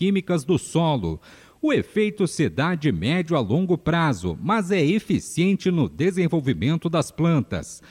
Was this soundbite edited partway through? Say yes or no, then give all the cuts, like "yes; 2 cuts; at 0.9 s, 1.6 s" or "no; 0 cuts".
no; 0 cuts